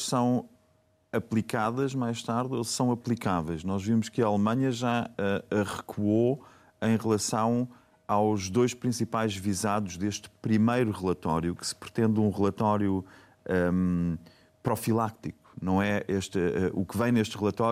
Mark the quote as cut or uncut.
uncut